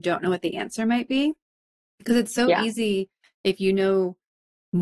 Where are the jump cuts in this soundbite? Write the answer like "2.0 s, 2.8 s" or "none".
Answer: none